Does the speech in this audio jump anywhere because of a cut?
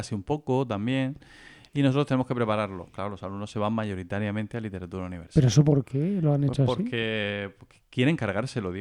no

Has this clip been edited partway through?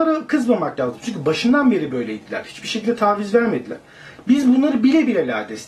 no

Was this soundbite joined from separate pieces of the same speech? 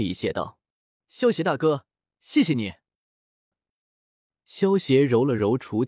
yes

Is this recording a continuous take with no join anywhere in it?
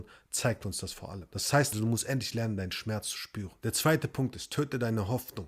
no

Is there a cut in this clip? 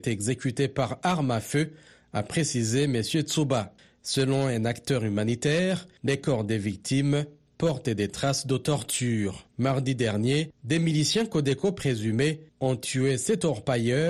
no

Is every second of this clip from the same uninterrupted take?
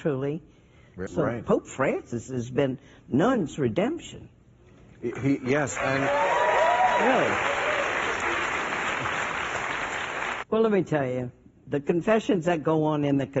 no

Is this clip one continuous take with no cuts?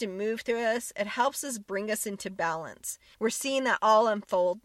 no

